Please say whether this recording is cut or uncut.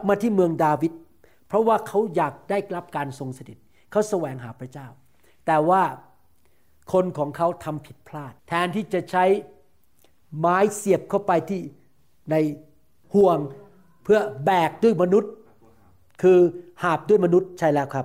cut